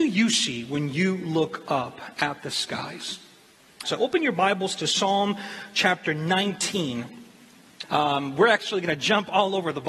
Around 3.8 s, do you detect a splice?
yes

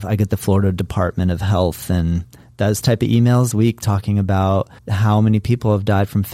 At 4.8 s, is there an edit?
yes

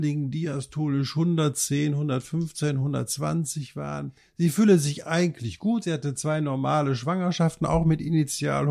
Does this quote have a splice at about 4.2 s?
no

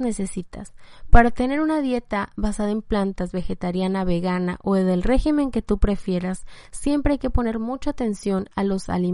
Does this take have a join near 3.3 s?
no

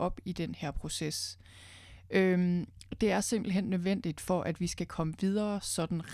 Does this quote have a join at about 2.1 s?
no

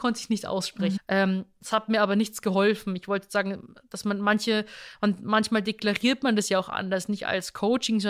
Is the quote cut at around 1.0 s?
yes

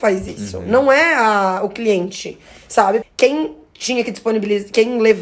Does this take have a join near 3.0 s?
yes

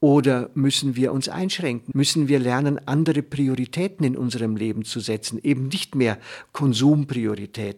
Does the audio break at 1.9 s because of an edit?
yes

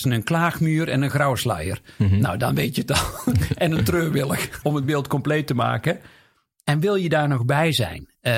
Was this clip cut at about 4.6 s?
yes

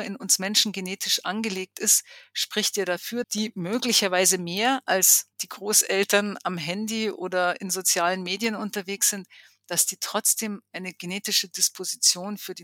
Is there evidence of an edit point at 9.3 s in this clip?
no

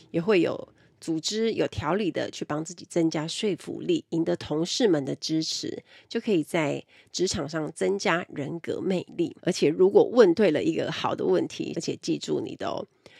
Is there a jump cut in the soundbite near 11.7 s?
yes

